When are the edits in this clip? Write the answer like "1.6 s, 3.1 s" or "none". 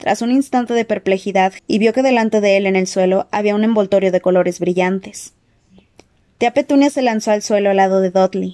1.6 s